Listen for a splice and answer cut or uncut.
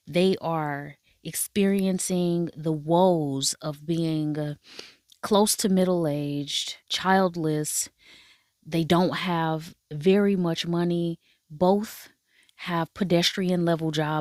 cut